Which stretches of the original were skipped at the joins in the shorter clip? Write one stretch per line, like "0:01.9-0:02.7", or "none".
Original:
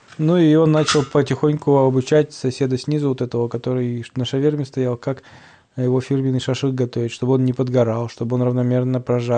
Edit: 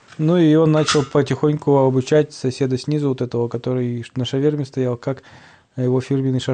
none